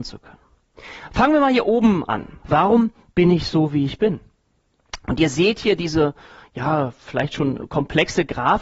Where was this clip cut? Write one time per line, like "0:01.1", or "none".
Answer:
0:02.4